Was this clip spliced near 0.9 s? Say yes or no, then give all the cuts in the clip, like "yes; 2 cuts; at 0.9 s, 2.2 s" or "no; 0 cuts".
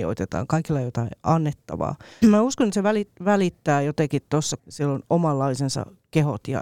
no; 2 cuts; at 2.2 s, 4.6 s